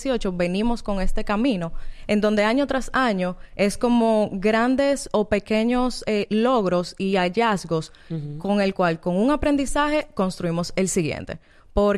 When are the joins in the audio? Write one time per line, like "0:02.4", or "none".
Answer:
none

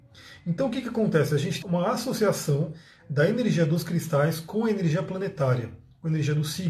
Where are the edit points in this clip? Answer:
0:01.6

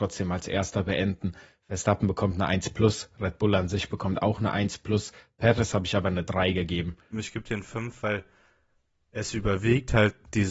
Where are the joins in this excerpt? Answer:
0:07.1

